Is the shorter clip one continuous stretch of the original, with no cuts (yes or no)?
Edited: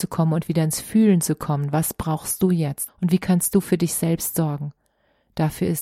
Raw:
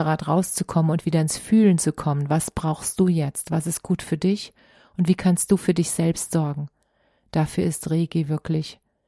no